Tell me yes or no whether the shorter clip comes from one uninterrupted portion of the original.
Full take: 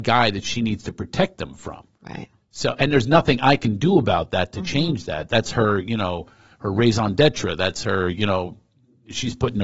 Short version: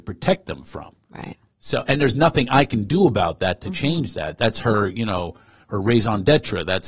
yes